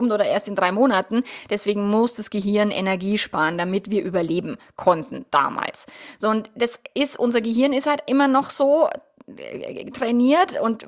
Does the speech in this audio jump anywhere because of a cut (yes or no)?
no